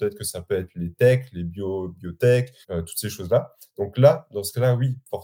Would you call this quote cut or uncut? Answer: cut